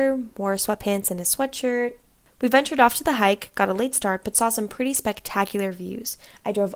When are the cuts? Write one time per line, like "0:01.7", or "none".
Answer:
none